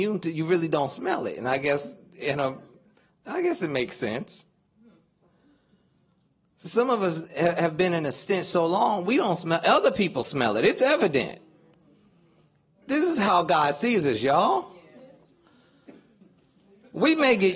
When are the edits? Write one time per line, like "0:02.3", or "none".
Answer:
none